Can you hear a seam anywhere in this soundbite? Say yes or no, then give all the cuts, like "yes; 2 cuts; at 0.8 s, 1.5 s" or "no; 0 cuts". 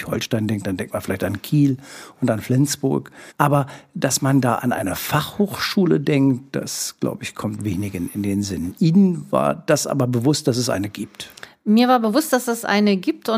no; 0 cuts